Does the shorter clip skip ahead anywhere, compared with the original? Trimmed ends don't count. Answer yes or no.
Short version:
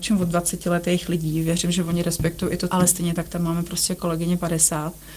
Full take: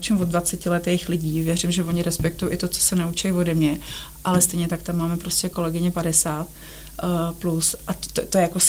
yes